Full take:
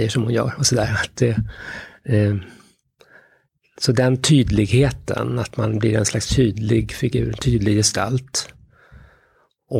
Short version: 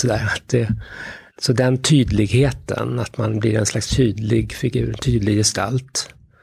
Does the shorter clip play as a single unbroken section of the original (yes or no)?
no